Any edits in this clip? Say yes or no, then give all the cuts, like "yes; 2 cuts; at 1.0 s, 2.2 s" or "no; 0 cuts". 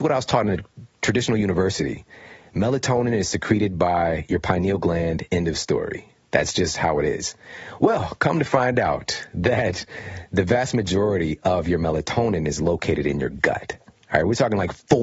no; 0 cuts